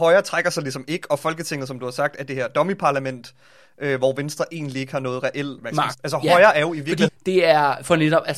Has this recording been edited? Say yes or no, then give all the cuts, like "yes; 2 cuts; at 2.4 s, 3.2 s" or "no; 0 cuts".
yes; 2 cuts; at 5.9 s, 7.1 s